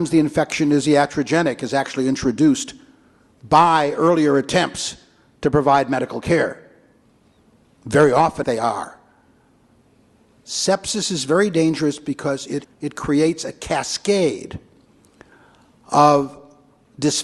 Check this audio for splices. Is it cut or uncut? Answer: cut